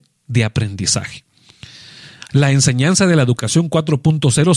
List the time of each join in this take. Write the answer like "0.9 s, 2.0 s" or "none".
2.3 s